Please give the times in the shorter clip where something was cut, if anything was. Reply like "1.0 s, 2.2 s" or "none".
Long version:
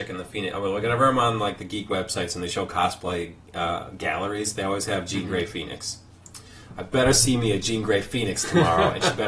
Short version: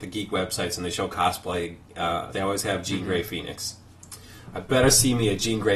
2.3 s